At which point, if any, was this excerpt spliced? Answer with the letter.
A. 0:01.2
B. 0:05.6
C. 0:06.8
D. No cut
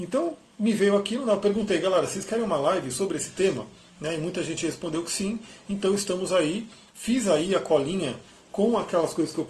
D